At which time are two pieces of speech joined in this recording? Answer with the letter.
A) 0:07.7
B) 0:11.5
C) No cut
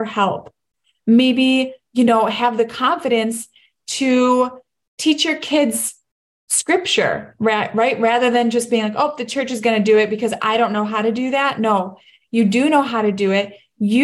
C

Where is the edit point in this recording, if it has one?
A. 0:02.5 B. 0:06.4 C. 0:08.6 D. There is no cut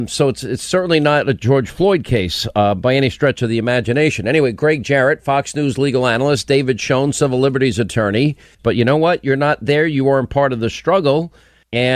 C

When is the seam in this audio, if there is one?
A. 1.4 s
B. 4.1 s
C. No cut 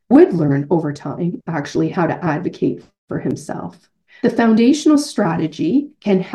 B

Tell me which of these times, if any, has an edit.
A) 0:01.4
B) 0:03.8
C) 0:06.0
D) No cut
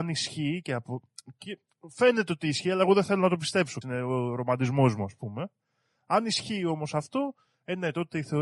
B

